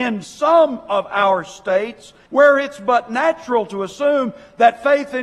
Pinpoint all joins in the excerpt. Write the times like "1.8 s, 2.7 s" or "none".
2.3 s